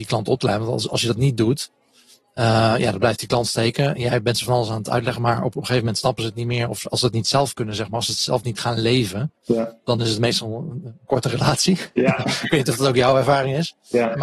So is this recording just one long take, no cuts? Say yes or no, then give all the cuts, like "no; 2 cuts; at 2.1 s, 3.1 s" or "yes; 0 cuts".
yes; 0 cuts